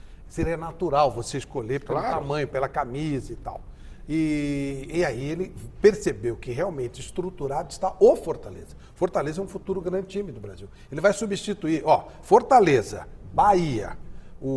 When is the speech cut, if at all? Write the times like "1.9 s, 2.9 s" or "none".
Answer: none